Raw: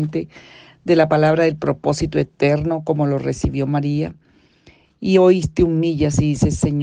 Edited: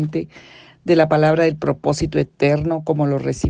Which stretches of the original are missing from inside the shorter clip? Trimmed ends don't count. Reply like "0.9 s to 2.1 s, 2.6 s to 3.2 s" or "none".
none